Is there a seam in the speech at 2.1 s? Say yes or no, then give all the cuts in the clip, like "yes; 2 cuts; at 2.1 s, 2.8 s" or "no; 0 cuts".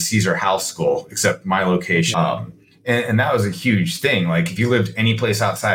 yes; 1 cut; at 2.1 s